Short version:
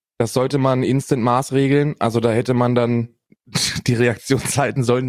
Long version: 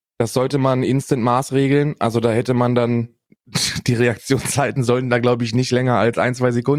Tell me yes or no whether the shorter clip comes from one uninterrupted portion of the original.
yes